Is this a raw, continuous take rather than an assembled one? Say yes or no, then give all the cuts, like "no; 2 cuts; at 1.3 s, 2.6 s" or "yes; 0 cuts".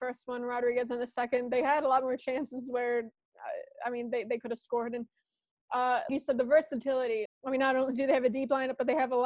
no; 2 cuts; at 6.1 s, 7.3 s